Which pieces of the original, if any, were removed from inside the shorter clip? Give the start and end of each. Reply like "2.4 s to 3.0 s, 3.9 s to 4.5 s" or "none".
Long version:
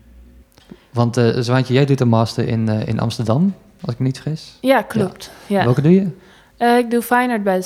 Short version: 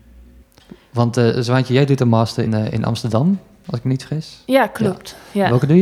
2.5 s to 2.6 s